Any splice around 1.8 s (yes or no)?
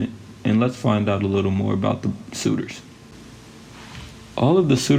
no